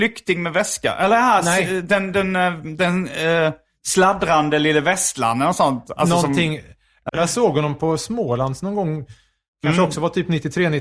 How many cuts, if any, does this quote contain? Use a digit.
1